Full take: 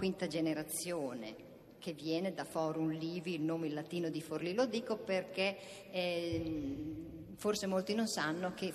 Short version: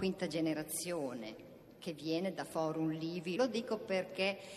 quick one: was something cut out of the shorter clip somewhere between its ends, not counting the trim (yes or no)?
yes